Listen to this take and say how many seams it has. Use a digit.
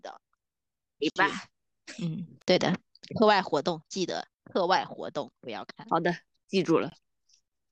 1